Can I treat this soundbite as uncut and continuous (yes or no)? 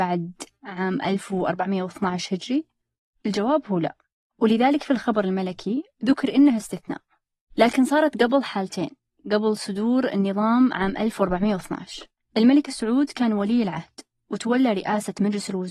yes